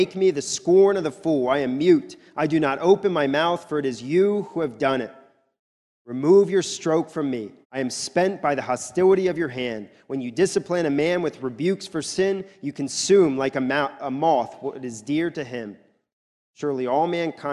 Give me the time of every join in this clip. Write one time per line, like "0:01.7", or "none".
0:07.6

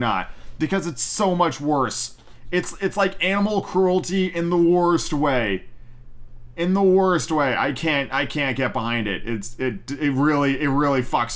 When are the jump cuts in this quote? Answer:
none

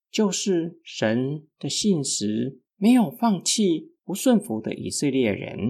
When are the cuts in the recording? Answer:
0:02.6

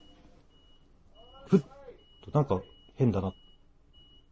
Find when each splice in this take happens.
0:01.5

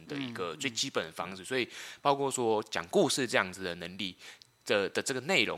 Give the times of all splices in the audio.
none

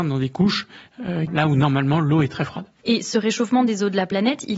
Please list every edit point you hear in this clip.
0:01.3

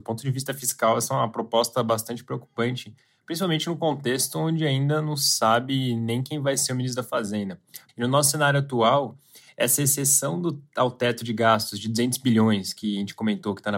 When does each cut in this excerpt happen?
0:07.9

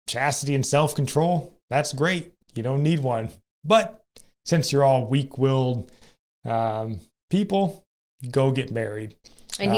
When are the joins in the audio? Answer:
0:02.4

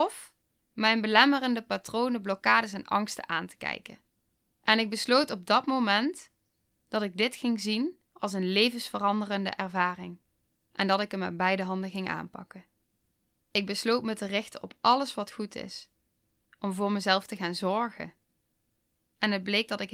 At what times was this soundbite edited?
none

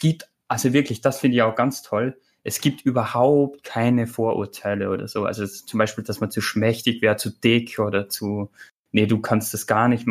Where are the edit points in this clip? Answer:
none

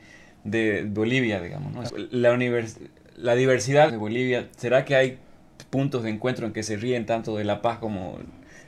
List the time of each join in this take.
0:01.9
0:03.9

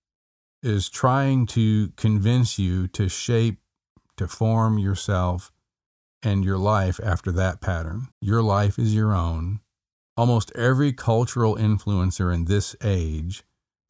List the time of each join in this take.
0:08.1
0:10.0

